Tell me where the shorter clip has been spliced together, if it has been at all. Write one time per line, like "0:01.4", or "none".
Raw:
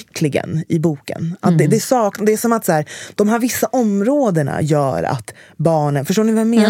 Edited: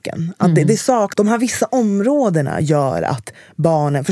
0:01.1